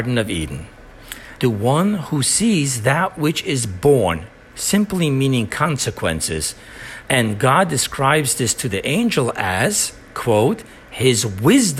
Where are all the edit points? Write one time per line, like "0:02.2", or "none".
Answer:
0:01.4
0:07.0